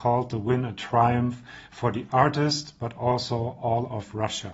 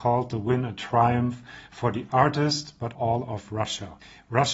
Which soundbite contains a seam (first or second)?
second